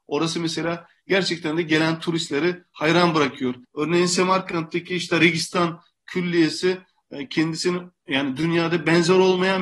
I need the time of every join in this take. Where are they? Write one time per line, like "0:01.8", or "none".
0:03.6